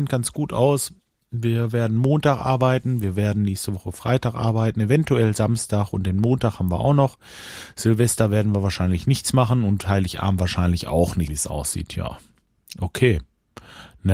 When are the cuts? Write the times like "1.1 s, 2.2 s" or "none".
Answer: 11.3 s